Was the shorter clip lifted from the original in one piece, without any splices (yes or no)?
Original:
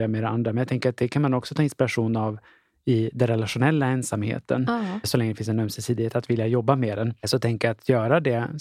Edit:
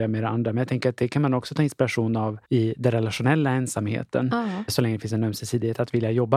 no